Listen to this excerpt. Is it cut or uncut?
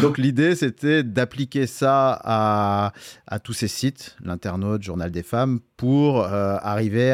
uncut